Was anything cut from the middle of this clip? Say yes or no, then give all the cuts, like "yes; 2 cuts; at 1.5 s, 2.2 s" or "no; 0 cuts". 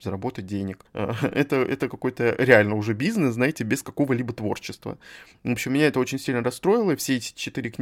no; 0 cuts